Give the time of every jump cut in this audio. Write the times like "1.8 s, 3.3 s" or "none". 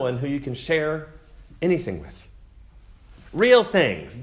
none